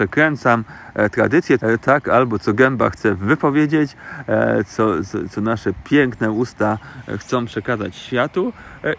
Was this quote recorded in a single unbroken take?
no; 1 cut; at 1.6 s

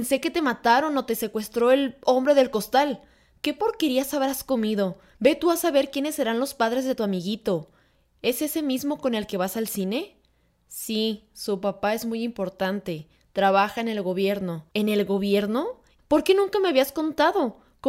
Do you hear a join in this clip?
yes; 2 cuts; at 14.7 s, 16.0 s

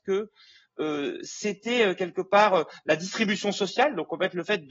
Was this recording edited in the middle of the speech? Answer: no; 0 cuts

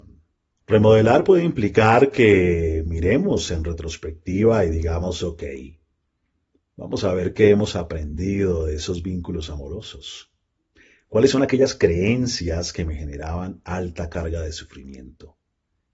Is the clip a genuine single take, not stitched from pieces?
yes; 0 cuts

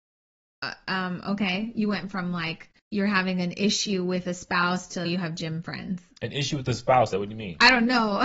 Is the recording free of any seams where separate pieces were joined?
no; 3 cuts; at 2.8 s, 5.0 s, 7.1 s

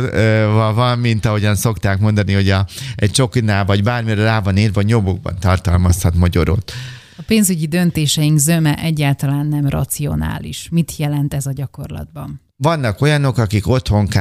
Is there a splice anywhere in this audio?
yes; 1 cut; at 12.5 s

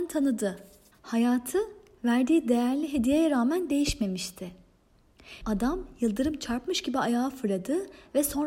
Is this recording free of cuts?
no; 2 cuts; at 0.9 s, 5.4 s

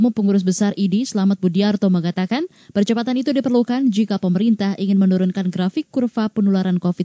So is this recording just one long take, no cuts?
yes; 0 cuts

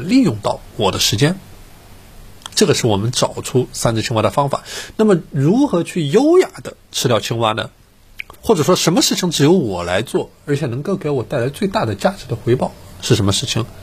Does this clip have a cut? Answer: yes; 1 cut; at 8.3 s

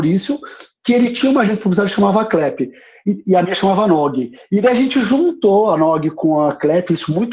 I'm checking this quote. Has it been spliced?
no; 0 cuts

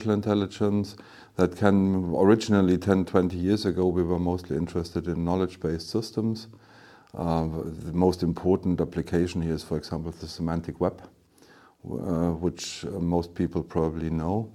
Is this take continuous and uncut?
yes; 0 cuts

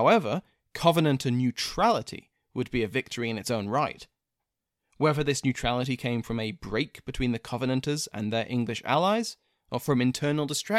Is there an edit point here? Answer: no; 0 cuts

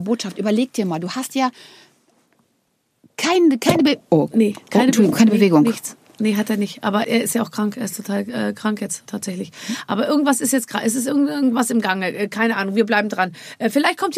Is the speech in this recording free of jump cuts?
no; 2 cuts; at 7.0 s, 9.1 s

